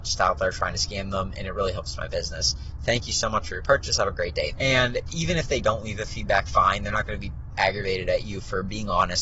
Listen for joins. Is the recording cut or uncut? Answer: cut